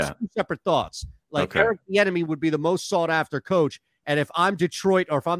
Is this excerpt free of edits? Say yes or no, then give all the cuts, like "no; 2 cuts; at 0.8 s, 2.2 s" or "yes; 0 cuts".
yes; 0 cuts